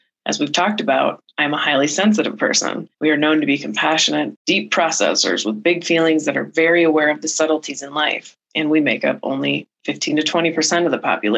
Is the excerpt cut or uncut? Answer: cut